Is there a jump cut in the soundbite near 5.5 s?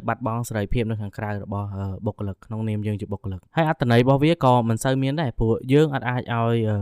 no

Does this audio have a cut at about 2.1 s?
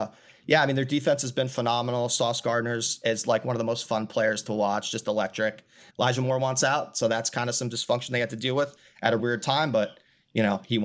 no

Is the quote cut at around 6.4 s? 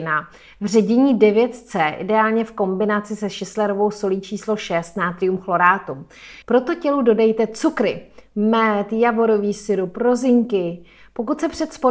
yes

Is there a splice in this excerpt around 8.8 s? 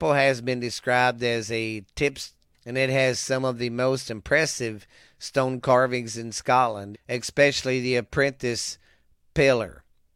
no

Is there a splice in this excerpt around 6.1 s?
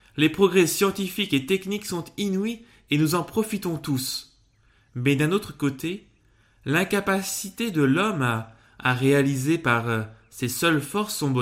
no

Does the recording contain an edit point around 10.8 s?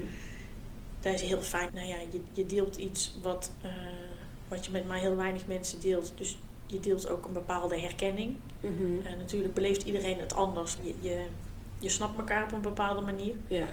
yes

